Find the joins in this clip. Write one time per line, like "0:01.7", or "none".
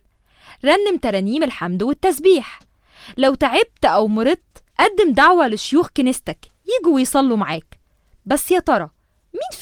0:04.7